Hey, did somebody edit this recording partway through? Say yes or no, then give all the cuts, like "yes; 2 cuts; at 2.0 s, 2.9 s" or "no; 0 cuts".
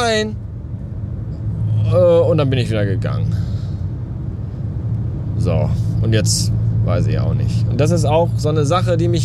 no; 0 cuts